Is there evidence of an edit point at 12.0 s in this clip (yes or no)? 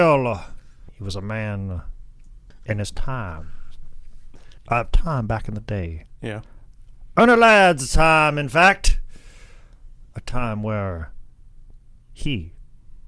no